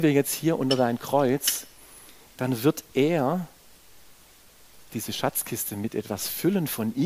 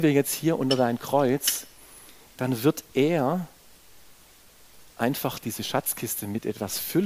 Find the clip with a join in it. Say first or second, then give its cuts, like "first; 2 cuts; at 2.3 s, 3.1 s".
first; 1 cut; at 4.9 s